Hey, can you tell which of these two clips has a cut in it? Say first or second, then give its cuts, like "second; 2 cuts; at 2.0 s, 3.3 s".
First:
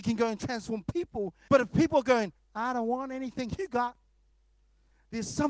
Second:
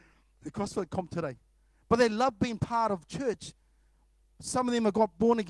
first; 1 cut; at 1.5 s